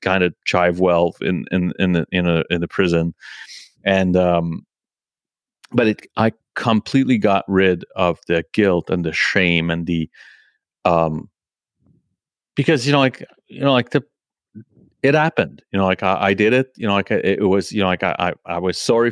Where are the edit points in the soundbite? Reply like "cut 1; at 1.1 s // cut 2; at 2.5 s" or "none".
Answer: none